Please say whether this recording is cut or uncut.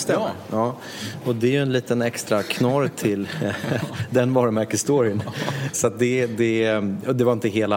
cut